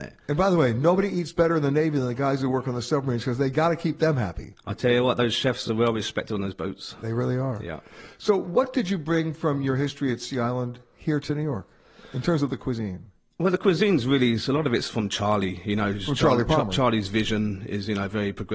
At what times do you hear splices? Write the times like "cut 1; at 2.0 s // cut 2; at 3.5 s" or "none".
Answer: none